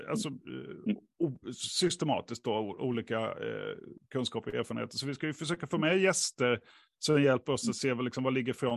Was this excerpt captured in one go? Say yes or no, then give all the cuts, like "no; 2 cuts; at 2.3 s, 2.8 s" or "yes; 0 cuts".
yes; 0 cuts